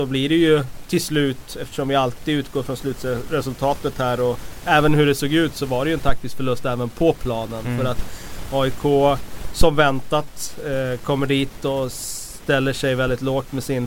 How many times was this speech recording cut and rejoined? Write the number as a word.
zero